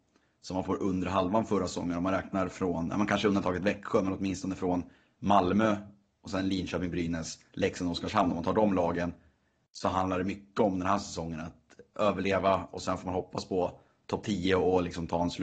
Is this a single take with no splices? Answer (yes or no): yes